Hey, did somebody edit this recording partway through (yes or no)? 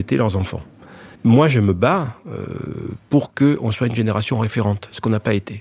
no